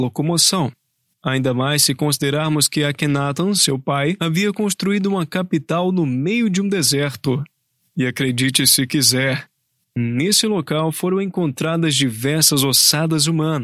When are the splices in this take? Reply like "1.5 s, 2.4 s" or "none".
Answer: none